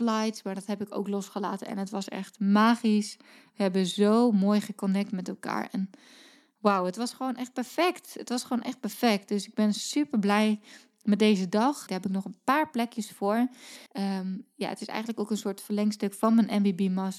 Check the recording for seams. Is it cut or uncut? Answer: cut